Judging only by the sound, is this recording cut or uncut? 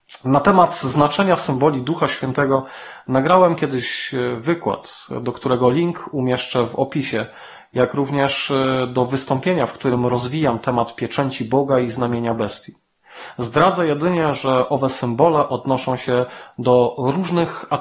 uncut